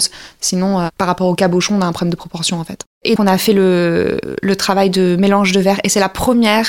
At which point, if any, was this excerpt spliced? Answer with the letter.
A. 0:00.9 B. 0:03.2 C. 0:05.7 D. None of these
B